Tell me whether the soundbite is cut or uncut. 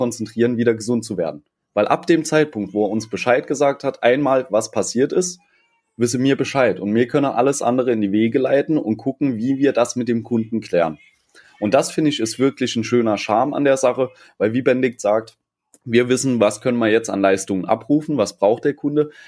uncut